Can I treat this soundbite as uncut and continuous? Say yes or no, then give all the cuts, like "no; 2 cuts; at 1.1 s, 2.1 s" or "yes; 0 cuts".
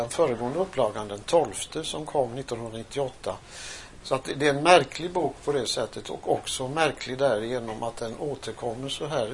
no; 1 cut; at 4.0 s